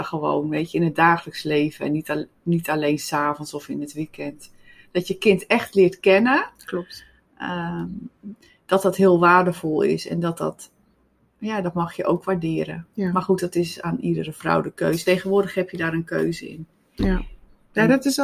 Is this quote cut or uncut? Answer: uncut